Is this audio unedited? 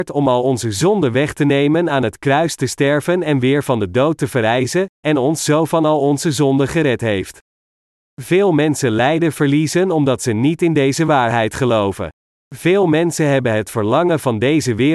yes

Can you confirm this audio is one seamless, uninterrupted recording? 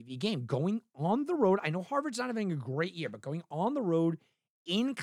yes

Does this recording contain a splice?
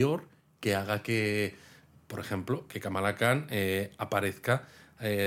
no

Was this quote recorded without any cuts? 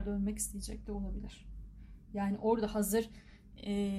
yes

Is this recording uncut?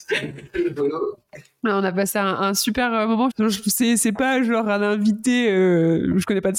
no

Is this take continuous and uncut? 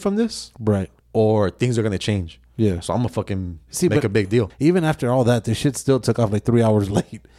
no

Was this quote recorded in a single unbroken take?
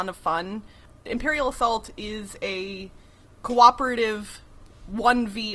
yes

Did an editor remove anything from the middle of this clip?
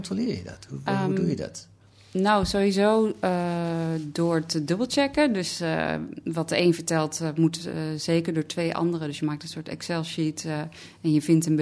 no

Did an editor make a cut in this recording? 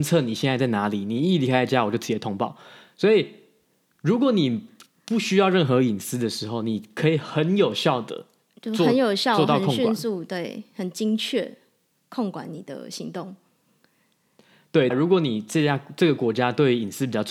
yes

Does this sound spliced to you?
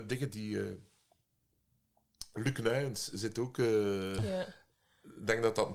yes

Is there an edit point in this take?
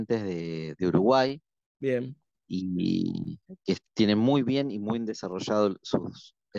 no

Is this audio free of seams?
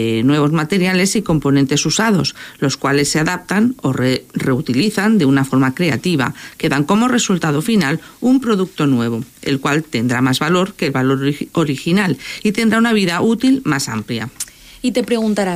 yes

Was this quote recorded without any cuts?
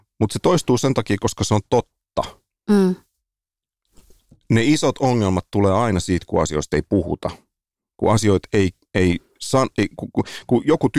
yes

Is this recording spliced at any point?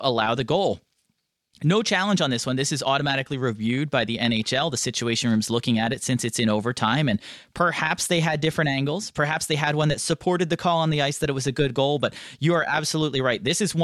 no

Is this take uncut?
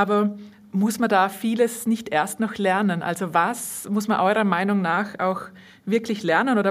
yes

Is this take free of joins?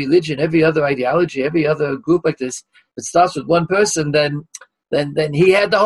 yes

